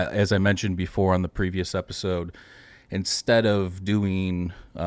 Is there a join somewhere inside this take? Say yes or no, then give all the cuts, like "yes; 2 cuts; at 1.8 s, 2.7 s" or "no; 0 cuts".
no; 0 cuts